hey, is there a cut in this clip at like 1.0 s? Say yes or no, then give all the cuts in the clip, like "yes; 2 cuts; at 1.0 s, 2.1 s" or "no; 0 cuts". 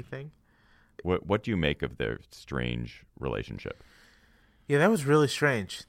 yes; 1 cut; at 1.0 s